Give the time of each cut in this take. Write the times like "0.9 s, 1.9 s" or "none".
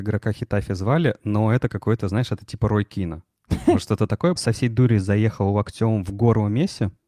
4.4 s